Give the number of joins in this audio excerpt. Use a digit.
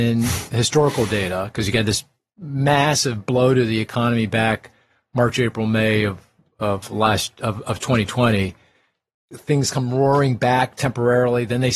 0